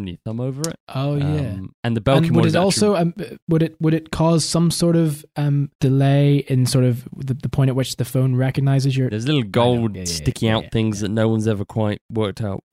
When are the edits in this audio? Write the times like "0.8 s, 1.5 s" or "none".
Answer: 9.1 s

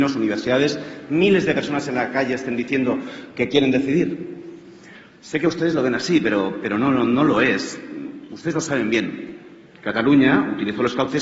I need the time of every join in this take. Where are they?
none

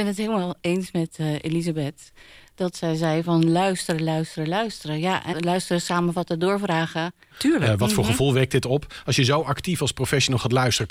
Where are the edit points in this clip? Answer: 5.3 s, 7.3 s

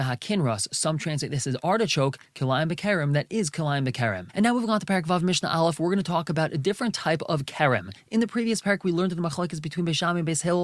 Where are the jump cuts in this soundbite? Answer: none

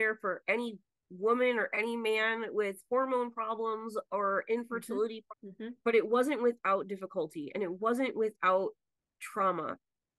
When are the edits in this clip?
5.3 s

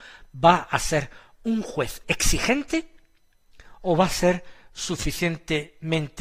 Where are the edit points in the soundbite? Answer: 2.0 s

